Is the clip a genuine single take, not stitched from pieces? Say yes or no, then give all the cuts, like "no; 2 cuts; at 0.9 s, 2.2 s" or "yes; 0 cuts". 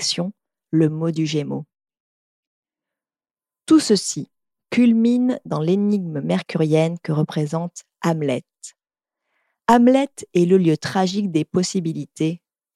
yes; 0 cuts